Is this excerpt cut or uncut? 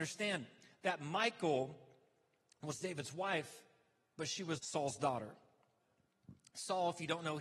cut